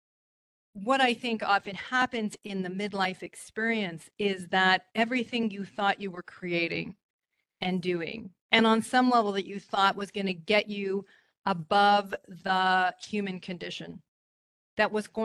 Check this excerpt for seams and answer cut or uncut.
uncut